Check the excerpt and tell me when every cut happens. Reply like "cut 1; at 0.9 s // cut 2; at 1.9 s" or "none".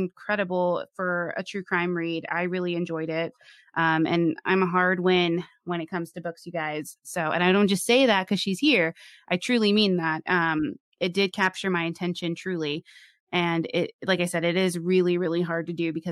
none